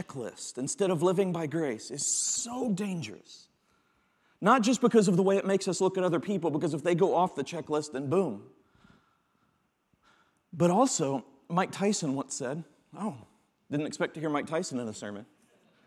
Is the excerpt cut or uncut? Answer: uncut